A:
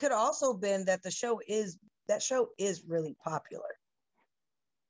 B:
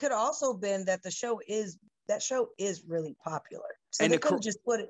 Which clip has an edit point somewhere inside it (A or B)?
B